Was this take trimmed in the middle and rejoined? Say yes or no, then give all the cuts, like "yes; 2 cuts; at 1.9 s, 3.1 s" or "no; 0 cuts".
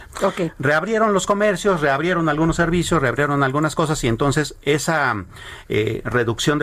no; 0 cuts